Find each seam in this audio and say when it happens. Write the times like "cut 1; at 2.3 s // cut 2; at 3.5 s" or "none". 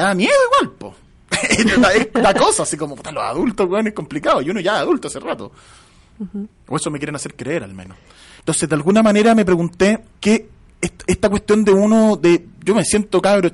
cut 1; at 8.4 s // cut 2; at 10.1 s